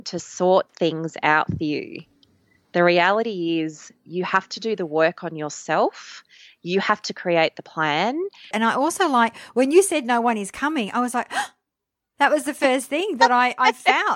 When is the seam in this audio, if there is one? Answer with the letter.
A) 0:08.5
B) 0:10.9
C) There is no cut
A